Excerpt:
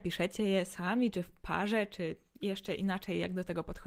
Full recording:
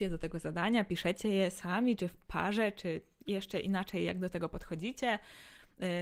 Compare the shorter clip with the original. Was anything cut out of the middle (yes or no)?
no